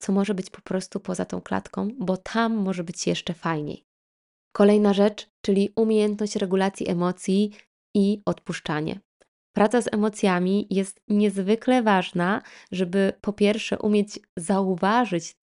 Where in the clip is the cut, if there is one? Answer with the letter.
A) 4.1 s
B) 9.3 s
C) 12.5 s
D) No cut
D